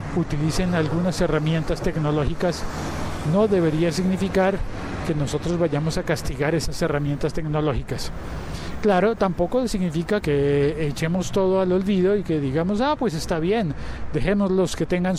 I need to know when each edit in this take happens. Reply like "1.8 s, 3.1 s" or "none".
none